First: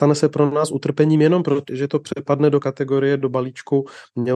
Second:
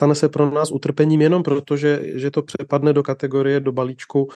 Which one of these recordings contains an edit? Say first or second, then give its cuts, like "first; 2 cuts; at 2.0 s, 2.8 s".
first; 1 cut; at 1.7 s